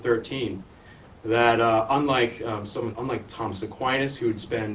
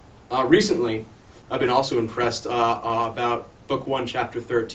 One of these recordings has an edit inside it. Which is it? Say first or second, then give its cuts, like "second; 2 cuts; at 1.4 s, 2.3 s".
first; 1 cut; at 2.9 s